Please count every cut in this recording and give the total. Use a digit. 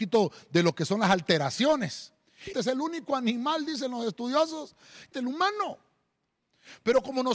2